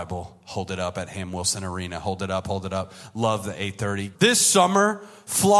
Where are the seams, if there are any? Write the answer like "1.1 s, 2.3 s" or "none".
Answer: 2.4 s, 4.1 s